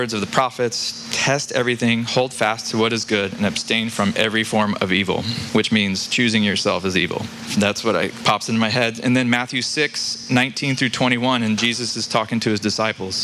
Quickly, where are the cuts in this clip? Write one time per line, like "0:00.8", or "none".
none